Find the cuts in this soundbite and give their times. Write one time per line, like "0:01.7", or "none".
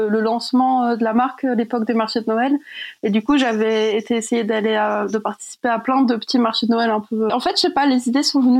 0:07.3